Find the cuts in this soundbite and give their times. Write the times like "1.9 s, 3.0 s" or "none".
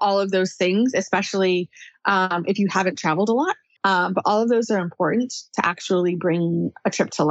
3.8 s

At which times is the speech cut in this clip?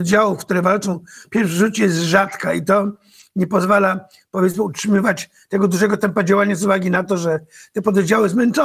none

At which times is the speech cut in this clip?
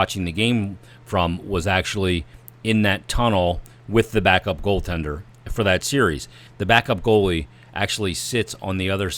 6.5 s

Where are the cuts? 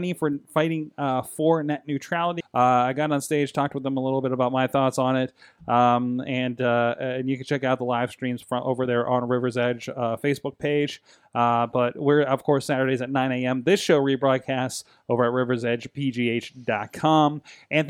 2.4 s

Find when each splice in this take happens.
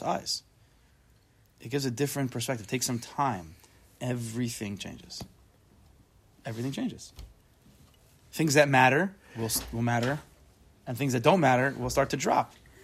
none

